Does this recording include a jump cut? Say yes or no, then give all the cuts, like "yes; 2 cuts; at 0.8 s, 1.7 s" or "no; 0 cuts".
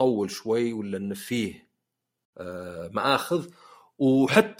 no; 0 cuts